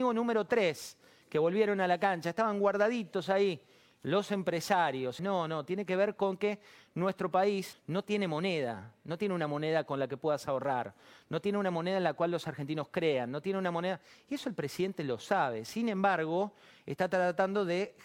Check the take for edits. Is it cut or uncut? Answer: cut